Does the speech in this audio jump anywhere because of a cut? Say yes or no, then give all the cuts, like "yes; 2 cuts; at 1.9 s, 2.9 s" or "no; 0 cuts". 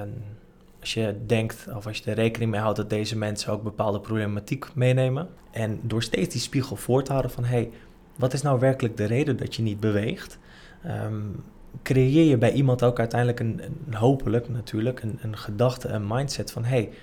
yes; 2 cuts; at 5.4 s, 15.0 s